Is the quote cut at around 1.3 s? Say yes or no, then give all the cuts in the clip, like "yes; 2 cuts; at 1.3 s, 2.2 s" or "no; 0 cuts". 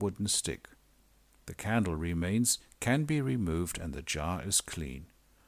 no; 0 cuts